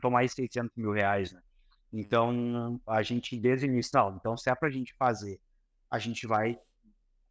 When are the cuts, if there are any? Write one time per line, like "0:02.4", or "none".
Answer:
none